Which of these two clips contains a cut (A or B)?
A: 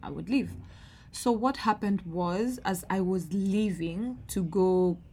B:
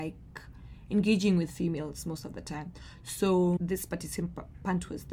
B